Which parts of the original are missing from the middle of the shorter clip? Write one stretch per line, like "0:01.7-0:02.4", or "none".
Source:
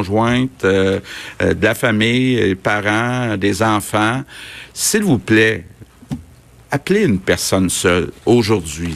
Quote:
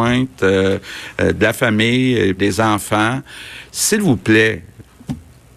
0:02.6-0:03.4